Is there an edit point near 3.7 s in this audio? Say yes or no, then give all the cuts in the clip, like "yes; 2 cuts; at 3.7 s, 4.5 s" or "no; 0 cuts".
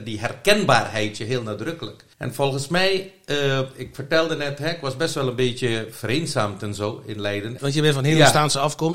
no; 2 cuts; at 2.1 s, 7.6 s